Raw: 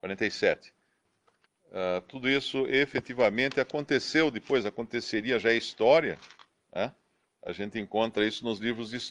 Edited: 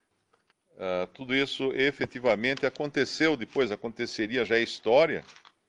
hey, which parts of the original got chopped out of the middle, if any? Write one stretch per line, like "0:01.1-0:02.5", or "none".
none